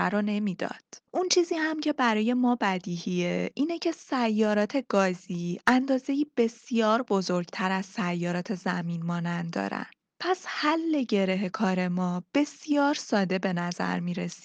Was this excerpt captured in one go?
yes; 0 cuts

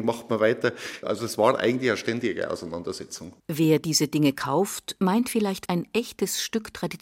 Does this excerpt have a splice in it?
yes; 3 cuts; at 1.0 s, 3.4 s, 5.7 s

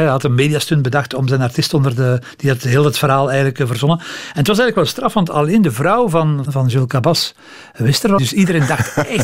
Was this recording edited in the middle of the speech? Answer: yes; 2 cuts; at 6.4 s, 8.2 s

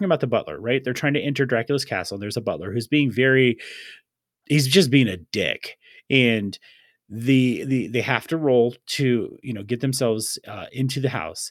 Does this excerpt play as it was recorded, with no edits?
yes; 0 cuts

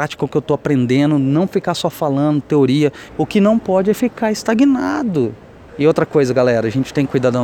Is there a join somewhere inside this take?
yes; 2 cuts; at 3.1 s, 5.7 s

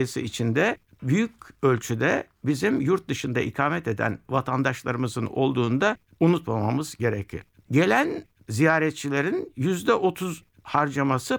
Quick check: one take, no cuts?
yes; 0 cuts

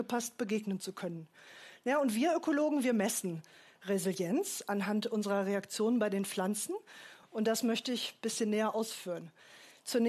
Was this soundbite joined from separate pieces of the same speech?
yes; 1 cut; at 7.2 s

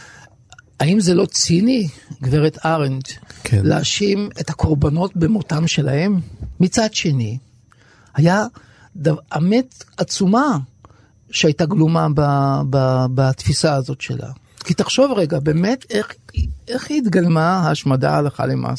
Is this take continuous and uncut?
no; 1 cut; at 6.6 s

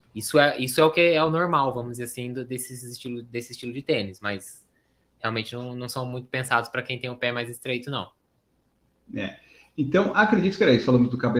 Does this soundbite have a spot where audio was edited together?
no; 0 cuts

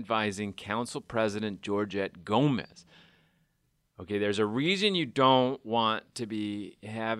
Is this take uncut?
yes; 0 cuts

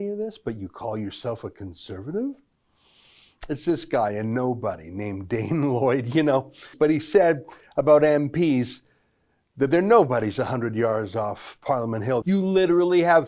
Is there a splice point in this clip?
yes; 2 cuts; at 6.7 s, 12.2 s

